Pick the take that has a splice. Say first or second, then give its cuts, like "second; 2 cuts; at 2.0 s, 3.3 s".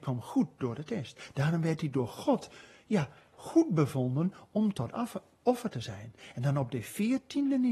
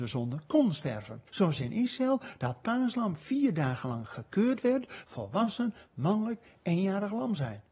second; 2 cuts; at 1.3 s, 5.0 s